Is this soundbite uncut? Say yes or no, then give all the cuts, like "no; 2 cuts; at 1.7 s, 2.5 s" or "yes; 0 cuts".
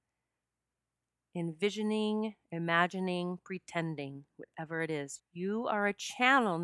no; 1 cut; at 5.2 s